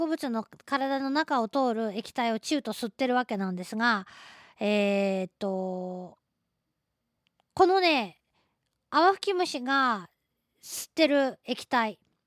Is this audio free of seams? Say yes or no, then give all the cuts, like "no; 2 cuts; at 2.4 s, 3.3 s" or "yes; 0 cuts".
yes; 0 cuts